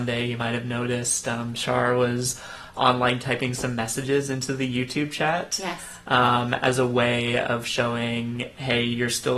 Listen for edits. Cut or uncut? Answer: uncut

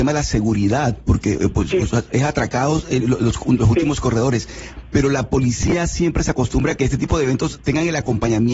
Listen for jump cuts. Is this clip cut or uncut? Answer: uncut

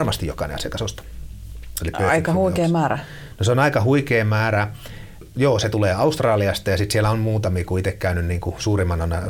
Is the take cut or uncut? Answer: cut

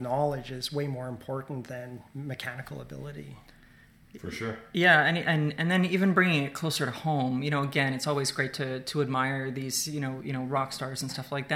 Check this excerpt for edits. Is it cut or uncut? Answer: uncut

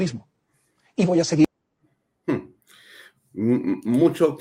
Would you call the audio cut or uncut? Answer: uncut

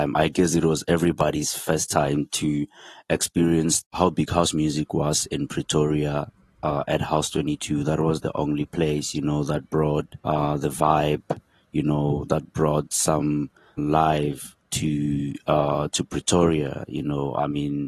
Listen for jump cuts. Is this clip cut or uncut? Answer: cut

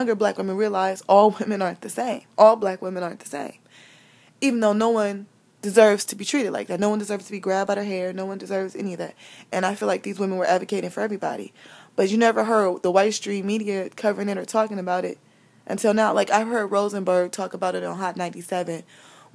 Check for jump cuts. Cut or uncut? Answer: uncut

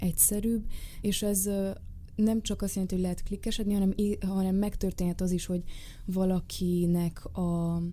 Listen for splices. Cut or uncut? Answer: cut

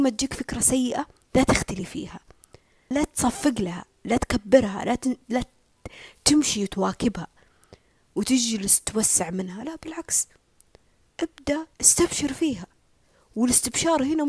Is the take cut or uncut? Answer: cut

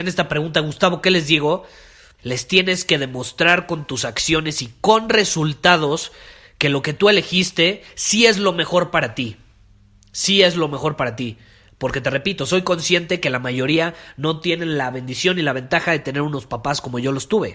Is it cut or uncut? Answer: cut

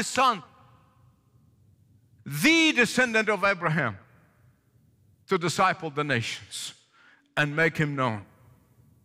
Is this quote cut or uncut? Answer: uncut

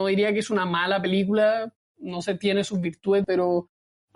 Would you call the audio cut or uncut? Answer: cut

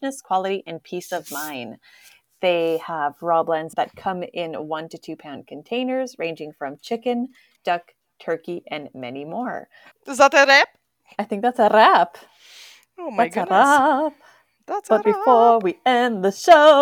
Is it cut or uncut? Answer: cut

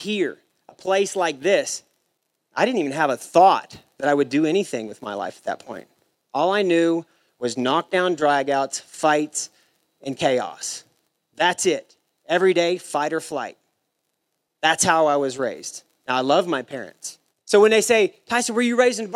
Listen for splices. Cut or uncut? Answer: cut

